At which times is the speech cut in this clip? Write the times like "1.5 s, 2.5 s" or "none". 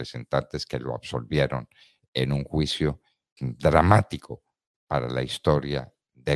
3.4 s